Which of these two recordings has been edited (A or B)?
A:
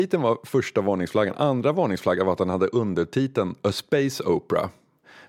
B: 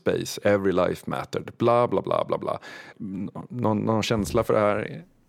B